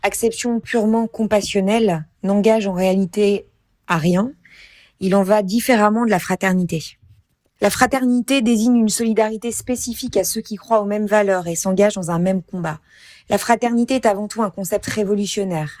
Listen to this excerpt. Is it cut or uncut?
uncut